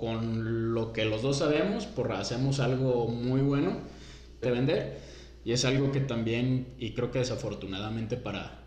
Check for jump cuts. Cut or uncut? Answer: cut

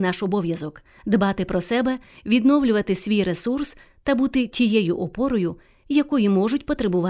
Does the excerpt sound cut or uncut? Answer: uncut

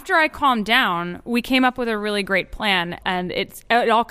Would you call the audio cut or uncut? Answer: cut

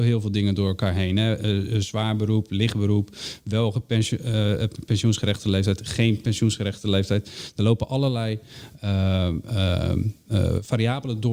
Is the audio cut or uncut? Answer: uncut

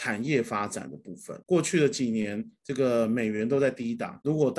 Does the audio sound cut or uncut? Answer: cut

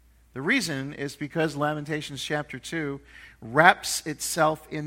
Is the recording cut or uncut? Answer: uncut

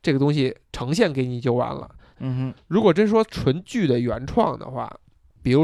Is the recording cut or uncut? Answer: cut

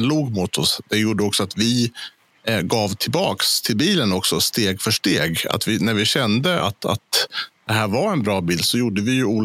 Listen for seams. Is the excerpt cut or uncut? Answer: uncut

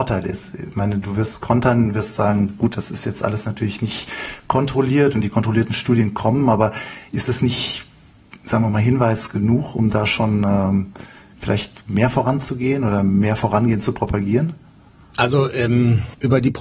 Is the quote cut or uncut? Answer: uncut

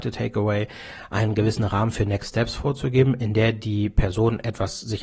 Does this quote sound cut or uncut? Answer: uncut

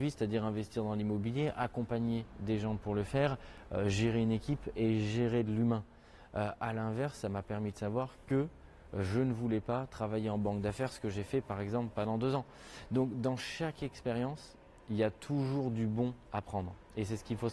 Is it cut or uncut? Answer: uncut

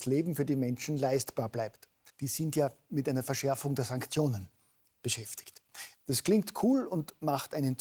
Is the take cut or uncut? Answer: cut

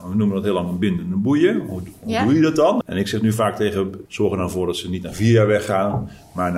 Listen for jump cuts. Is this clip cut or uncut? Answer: cut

